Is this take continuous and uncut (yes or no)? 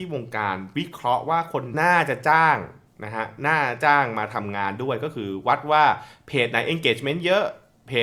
no